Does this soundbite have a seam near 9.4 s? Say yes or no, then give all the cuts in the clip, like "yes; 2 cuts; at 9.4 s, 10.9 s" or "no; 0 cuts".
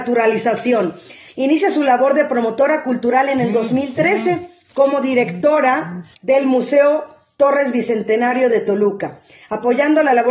no; 2 cuts; at 1.3 s, 6.1 s